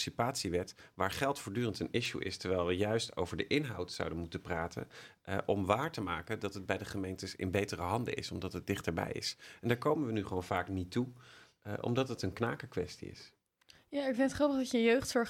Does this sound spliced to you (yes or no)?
no